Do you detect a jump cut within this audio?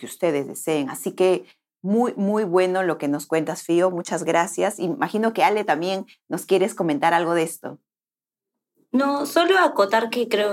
no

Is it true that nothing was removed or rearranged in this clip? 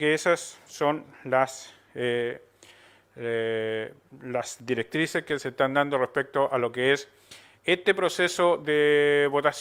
yes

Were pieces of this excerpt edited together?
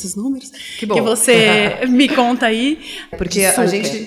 yes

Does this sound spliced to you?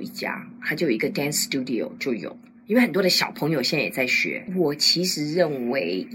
yes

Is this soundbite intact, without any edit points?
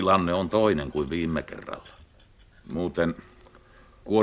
no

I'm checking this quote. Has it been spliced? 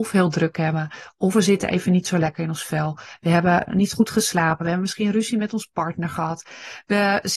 no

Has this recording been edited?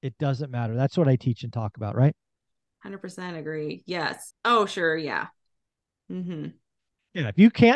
yes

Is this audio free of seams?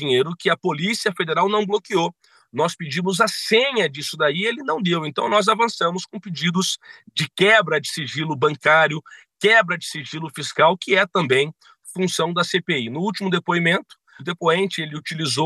no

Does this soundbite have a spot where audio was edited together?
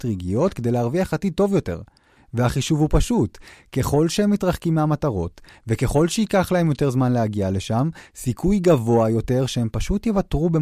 yes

